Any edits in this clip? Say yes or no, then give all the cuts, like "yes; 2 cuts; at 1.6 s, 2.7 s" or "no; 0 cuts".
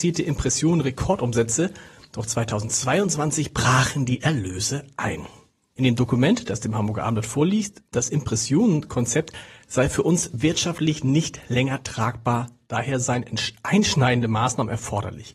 yes; 2 cuts; at 5.7 s, 7.9 s